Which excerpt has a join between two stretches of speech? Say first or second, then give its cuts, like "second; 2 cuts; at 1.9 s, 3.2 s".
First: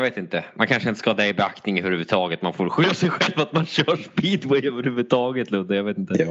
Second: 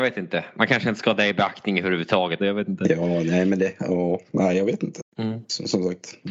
second; 2 cuts; at 2.4 s, 5.0 s